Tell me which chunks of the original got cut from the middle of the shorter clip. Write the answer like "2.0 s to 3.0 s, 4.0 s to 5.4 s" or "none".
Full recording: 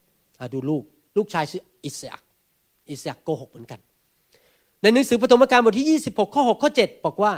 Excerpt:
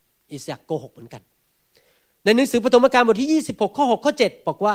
none